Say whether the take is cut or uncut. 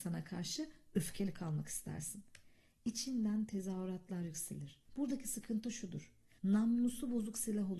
cut